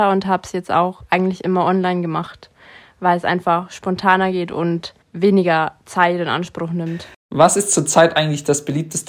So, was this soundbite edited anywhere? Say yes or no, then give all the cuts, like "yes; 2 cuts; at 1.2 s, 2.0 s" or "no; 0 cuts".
yes; 2 cuts; at 5.0 s, 7.1 s